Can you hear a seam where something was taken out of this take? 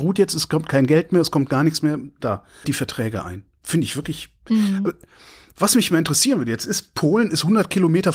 yes; 1 cut; at 2.6 s

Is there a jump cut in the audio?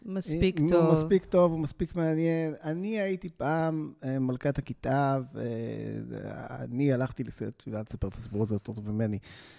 no; 0 cuts

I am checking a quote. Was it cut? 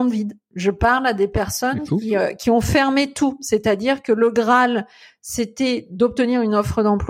no; 0 cuts

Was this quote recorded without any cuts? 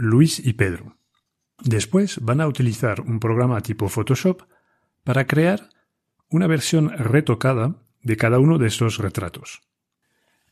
no; 1 cut; at 1.6 s

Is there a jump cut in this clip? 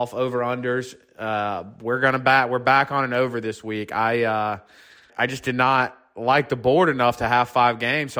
yes; 1 cut; at 5.1 s

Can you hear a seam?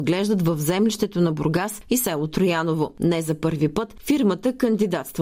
no; 0 cuts

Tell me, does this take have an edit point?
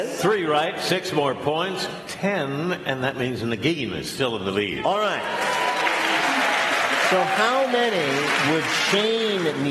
no; 0 cuts

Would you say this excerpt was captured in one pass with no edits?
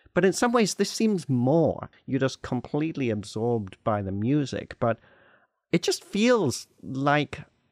no; 1 cut; at 1.9 s

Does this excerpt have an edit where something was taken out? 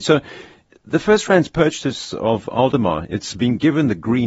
no; 0 cuts

